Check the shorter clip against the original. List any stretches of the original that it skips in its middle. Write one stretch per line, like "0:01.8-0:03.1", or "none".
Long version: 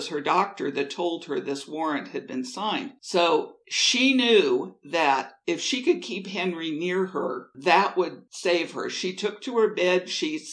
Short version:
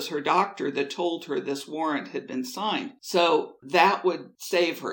0:03.6-0:07.5